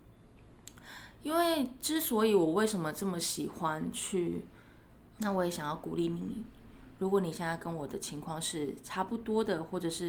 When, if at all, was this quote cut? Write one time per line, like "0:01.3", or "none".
0:05.2